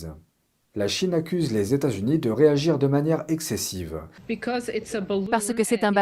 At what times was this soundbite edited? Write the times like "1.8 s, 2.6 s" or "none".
4.2 s